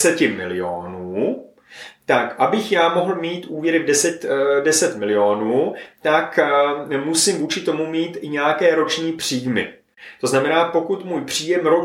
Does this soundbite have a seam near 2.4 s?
no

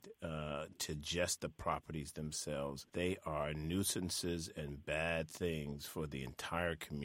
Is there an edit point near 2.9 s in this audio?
yes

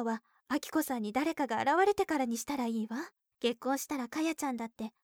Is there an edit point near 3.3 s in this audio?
yes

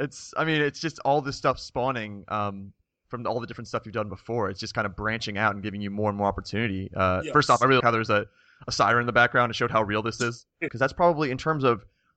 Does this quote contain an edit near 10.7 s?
yes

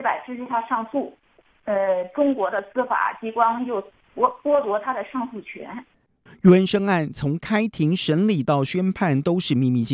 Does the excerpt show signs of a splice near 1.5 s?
yes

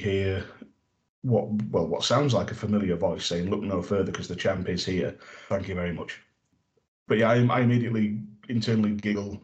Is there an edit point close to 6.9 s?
no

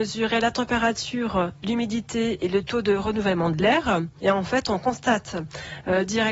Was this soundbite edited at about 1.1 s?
no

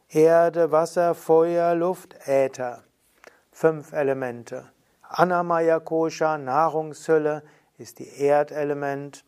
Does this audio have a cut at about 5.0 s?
yes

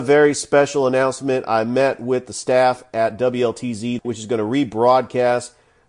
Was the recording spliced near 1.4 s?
no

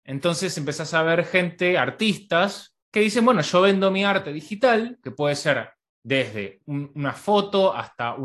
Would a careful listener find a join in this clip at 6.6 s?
yes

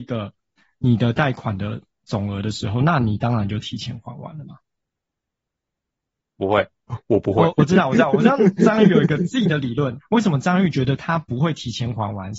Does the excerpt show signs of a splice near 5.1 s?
no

